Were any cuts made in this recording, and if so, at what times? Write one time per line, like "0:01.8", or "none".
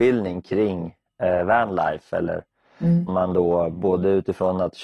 0:03.1